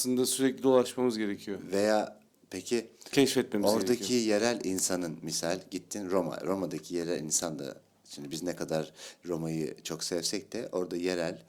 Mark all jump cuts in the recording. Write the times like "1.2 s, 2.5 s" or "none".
none